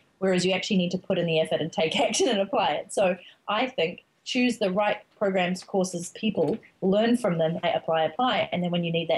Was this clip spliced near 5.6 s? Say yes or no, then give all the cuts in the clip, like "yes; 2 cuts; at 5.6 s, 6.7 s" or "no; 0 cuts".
no; 1 cut; at 7.6 s